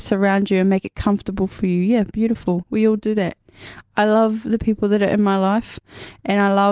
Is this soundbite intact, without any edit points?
yes; 0 cuts

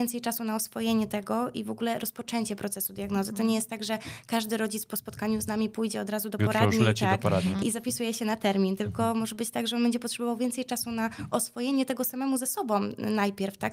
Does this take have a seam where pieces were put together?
yes; 1 cut; at 7.6 s

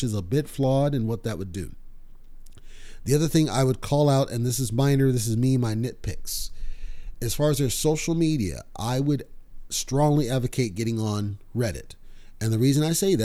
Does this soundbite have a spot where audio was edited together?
no; 0 cuts

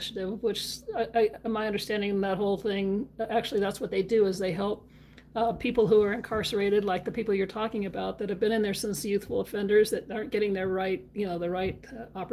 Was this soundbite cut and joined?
no; 0 cuts

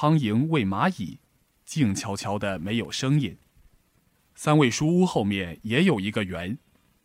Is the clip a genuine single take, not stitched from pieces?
no; 1 cut; at 4.1 s

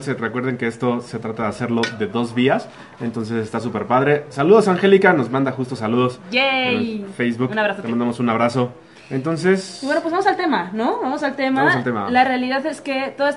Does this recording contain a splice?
no; 0 cuts

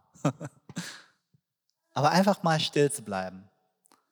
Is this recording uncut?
yes; 0 cuts

